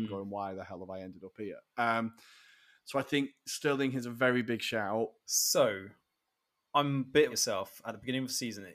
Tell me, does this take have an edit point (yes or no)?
yes